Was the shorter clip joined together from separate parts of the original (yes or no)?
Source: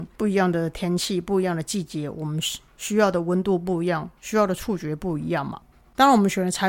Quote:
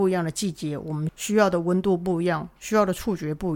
yes